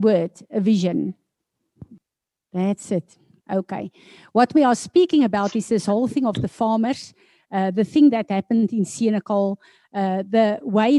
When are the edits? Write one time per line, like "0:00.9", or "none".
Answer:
0:03.4